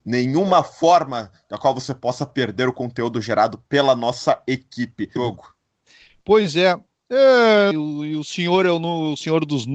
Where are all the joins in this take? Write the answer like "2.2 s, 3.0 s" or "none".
5.2 s, 7.7 s